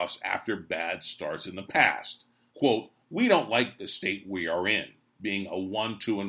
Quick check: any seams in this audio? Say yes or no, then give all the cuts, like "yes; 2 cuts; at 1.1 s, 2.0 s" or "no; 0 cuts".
yes; 1 cut; at 2.5 s